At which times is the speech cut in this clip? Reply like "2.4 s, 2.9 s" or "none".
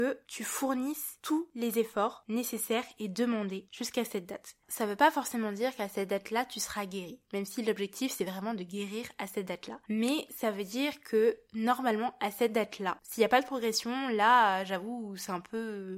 none